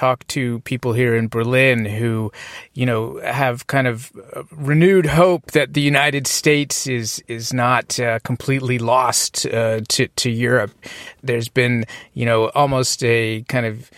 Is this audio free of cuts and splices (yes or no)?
yes